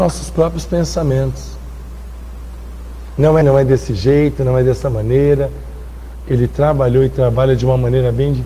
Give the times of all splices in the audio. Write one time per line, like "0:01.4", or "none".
0:03.4
0:06.2

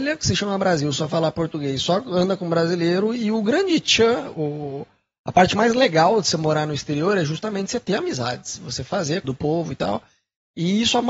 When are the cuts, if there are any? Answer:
0:04.3
0:09.2

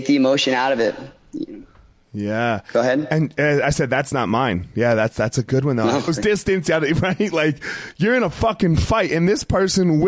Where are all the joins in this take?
0:06.1

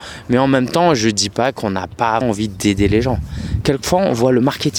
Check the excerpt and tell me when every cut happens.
0:02.2
0:03.6

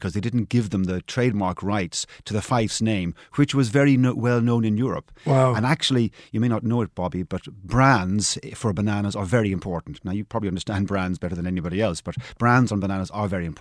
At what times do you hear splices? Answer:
none

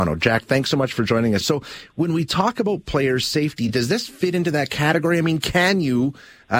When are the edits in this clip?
0:01.4

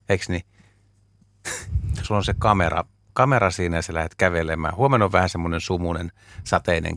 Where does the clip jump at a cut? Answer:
0:02.0

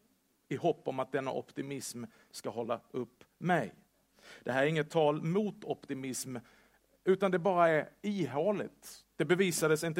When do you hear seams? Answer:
none

